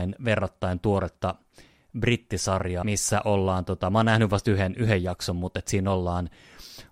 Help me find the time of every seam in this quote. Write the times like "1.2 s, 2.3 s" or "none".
2.8 s